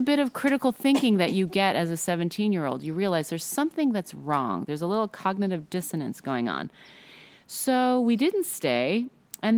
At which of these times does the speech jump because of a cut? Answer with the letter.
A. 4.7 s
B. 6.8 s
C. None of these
C